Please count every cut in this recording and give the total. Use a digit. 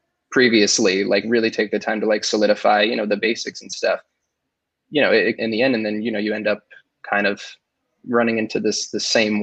1